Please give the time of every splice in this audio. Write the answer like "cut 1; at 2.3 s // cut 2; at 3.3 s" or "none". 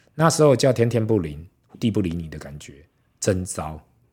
cut 1; at 1.7 s